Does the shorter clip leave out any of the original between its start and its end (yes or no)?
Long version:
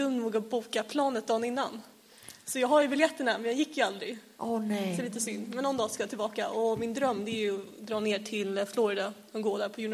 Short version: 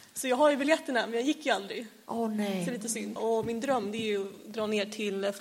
yes